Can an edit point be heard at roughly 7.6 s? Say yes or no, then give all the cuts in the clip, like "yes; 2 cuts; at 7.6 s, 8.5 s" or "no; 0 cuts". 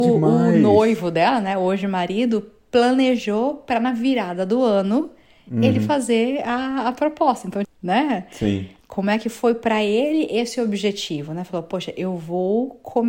yes; 2 cuts; at 7.6 s, 8.8 s